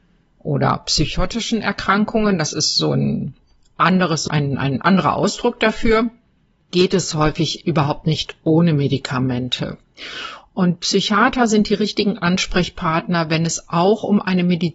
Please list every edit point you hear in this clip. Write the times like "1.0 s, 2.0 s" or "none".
4.3 s, 10.4 s